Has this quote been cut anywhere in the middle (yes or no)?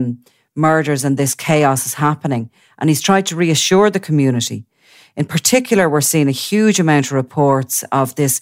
no